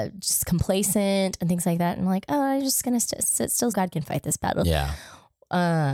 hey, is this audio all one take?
no; 1 cut; at 3.7 s

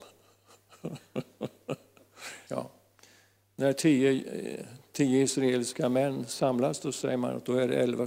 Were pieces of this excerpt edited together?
yes; 1 cut; at 2.5 s

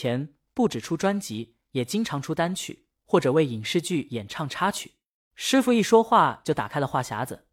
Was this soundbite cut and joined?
yes; 1 cut; at 5.2 s

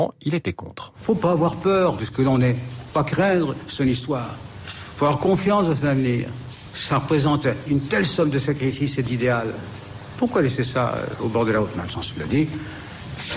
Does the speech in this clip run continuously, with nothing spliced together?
yes; 0 cuts

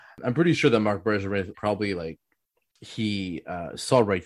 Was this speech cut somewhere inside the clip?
yes; 1 cut; at 1.5 s

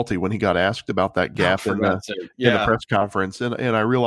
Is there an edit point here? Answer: no; 0 cuts

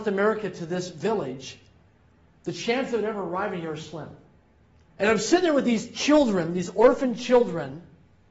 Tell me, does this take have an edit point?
yes; 1 cut; at 4.9 s

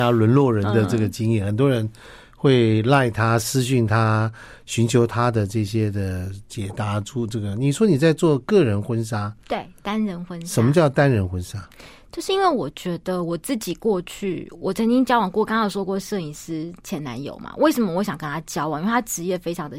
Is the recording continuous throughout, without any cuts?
yes; 0 cuts

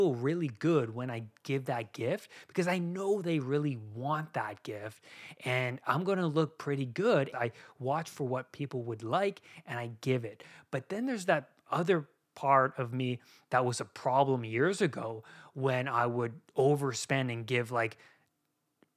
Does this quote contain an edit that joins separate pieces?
yes; 1 cut; at 7.3 s

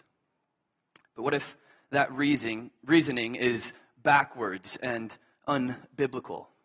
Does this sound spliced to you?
yes; 1 cut; at 1.0 s

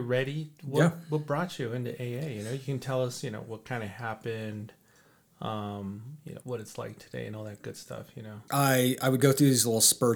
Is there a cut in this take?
yes; 2 cuts; at 6.4 s, 8.5 s

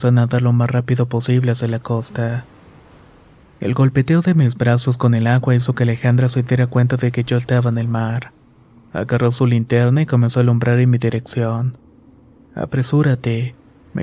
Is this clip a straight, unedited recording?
yes; 0 cuts

